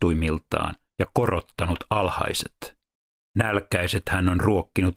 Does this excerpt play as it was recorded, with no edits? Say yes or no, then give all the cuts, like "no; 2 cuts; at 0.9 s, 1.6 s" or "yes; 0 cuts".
yes; 0 cuts